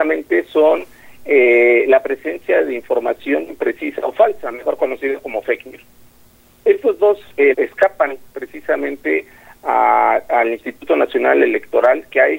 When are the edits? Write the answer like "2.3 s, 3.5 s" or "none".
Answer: 7.5 s